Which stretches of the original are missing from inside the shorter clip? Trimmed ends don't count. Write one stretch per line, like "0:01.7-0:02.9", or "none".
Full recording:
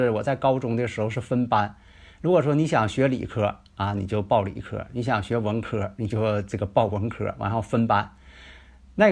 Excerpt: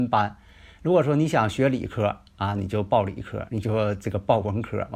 0:04.9-0:05.9